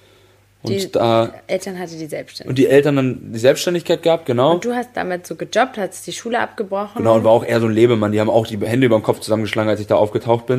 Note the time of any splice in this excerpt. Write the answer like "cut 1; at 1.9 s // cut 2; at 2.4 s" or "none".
none